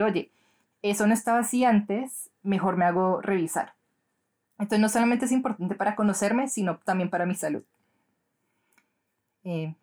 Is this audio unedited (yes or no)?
yes